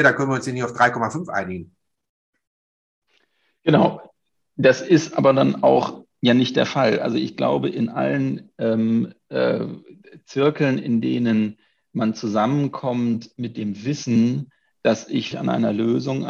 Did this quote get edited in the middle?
yes; 1 cut; at 15.3 s

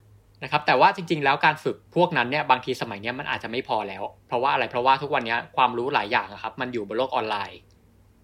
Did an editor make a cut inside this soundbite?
yes; 1 cut; at 1.9 s

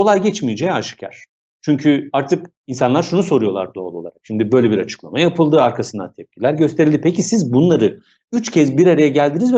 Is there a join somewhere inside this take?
no; 0 cuts

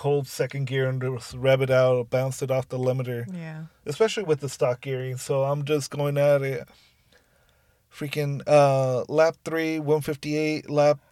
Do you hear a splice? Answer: no; 0 cuts

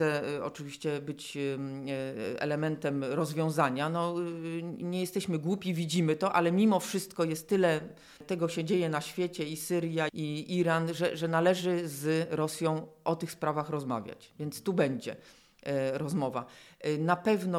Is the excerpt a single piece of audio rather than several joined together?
no; 1 cut; at 10.1 s

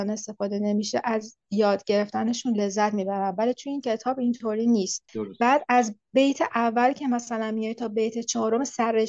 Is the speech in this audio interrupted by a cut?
yes; 1 cut; at 5.1 s

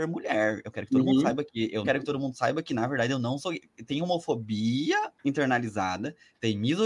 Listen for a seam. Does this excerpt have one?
yes; 2 cuts; at 1.8 s, 5.2 s

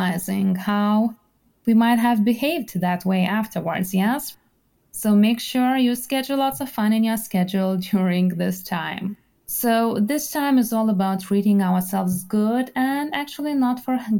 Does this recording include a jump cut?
yes; 2 cuts; at 4.8 s, 9.4 s

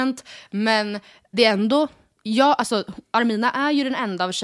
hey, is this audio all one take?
no; 1 cut; at 1.3 s

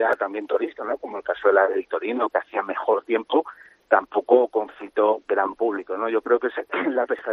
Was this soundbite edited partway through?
no; 0 cuts

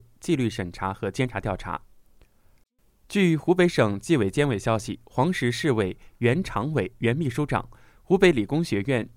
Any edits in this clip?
no; 0 cuts

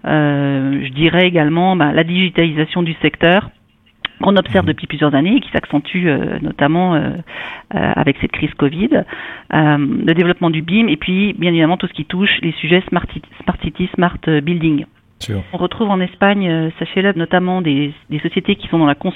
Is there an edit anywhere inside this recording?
yes; 2 cuts; at 15.5 s, 17.1 s

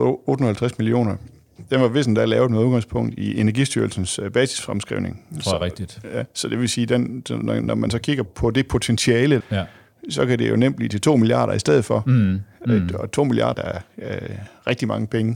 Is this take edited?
yes; 3 cuts; at 8.3 s, 9.4 s, 13.5 s

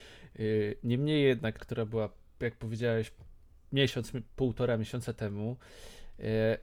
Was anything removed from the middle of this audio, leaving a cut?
yes; 1 cut; at 1.6 s

